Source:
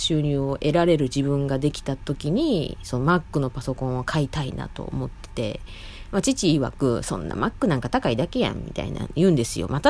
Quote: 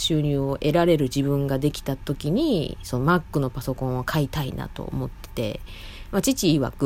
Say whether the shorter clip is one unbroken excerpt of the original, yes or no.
yes